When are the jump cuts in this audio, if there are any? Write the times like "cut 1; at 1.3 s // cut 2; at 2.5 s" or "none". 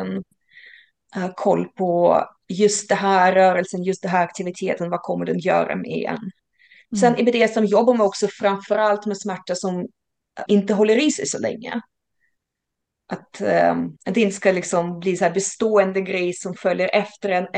cut 1; at 10.5 s // cut 2; at 14.0 s